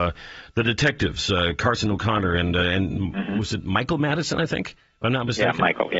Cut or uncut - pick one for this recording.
uncut